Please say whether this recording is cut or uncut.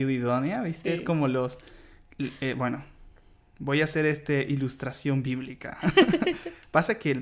uncut